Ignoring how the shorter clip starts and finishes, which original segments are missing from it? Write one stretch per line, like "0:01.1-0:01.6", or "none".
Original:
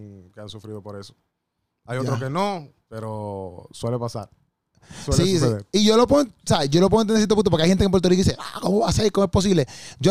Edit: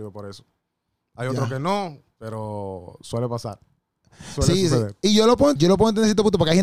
0:06.3-0:06.7

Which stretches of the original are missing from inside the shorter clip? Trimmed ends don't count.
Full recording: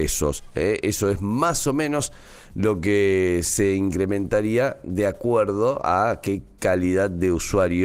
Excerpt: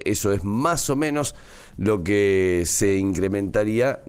none

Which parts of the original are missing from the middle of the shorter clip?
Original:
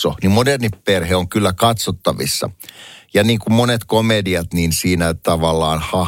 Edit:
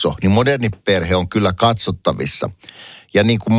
none

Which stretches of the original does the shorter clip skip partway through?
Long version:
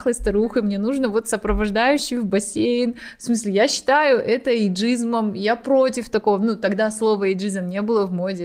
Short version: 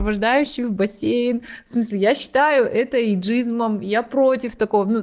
none

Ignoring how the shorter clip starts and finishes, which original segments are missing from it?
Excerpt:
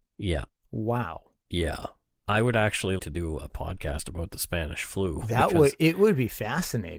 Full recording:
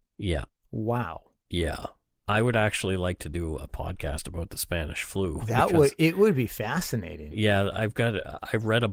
0:03.0-0:03.2

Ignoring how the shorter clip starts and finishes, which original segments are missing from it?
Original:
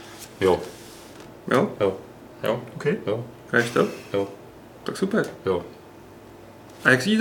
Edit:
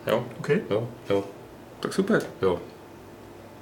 0:03.4-0:04.1

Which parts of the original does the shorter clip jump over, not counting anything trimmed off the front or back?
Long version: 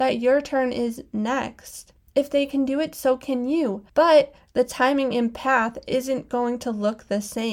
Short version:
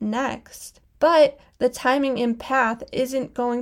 0:02.1-0:03.9

